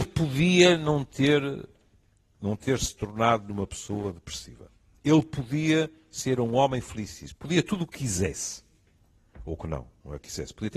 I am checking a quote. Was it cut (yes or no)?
no